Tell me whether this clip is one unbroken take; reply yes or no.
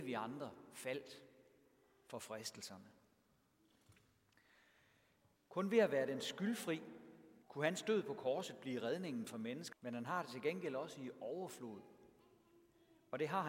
no